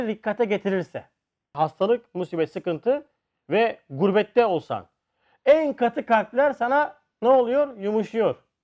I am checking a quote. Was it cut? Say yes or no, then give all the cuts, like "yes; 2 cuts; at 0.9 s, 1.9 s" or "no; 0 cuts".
no; 0 cuts